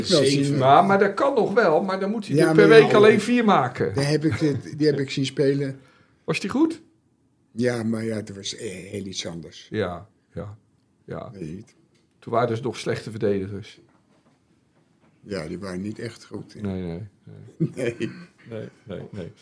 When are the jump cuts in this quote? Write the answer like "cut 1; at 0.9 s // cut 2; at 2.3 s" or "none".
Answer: none